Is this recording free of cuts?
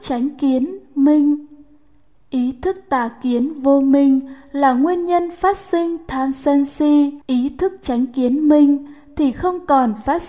no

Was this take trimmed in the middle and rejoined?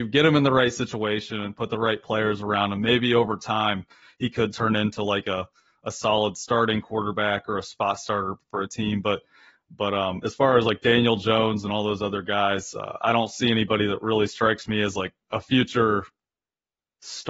no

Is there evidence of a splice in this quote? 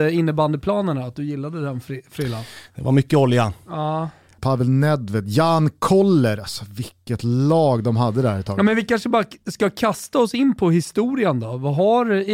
yes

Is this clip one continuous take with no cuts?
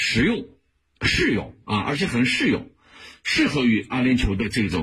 no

